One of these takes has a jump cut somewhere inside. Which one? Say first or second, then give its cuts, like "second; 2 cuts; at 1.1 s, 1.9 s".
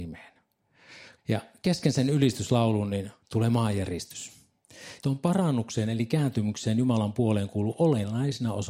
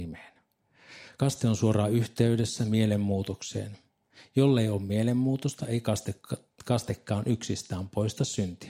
first; 2 cuts; at 1.2 s, 5.0 s